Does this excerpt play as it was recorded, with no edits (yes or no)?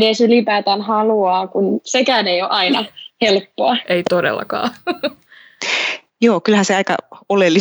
yes